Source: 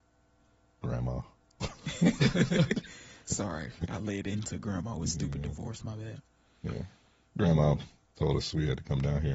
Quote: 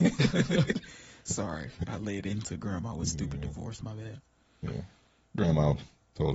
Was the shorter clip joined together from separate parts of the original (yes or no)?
no